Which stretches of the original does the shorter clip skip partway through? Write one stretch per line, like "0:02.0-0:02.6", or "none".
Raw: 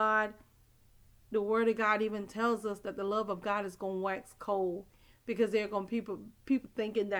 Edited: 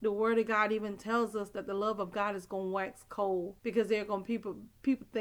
0:04.9-0:05.2